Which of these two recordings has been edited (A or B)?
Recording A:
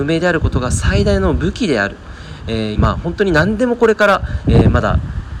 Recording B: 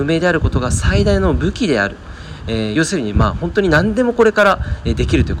A